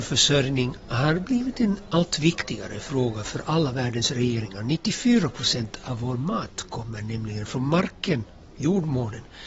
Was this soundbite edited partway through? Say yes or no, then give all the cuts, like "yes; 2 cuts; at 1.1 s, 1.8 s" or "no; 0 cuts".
no; 0 cuts